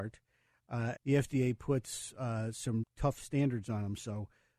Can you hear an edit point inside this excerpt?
yes; 2 cuts; at 1.0 s, 2.8 s

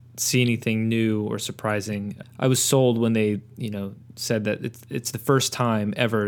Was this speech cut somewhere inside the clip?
yes; 1 cut; at 2.2 s

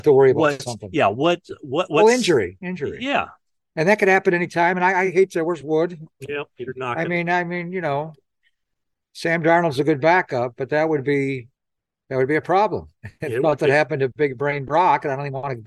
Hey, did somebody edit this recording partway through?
no; 0 cuts

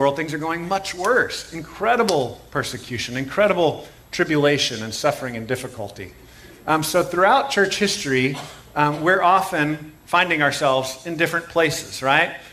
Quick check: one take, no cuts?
yes; 0 cuts

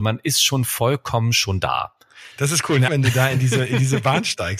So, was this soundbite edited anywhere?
yes; 1 cut; at 2.9 s

